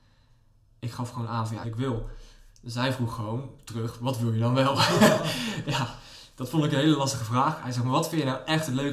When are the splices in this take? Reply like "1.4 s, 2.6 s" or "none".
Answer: 1.6 s